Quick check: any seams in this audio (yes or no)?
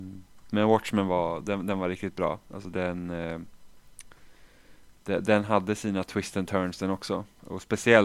no